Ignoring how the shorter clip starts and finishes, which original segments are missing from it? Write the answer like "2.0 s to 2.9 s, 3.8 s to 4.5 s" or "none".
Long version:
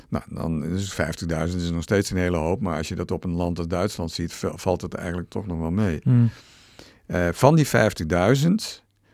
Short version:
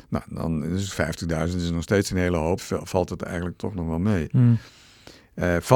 2.6 s to 4.3 s